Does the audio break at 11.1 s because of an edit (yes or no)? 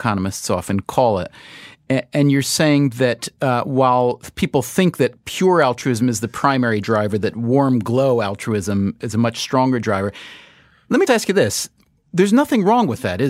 yes